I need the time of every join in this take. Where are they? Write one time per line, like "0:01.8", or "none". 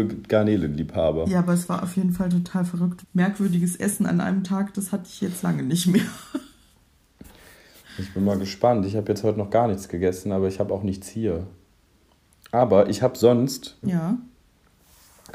0:03.0
0:13.8